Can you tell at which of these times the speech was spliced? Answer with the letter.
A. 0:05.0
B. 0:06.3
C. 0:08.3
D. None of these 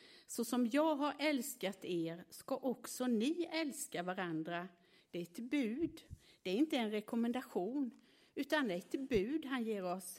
A